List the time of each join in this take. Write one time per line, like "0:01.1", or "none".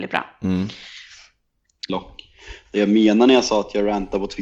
0:01.9